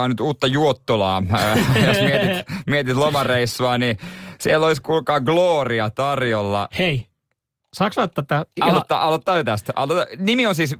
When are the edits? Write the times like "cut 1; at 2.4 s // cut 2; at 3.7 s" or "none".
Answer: none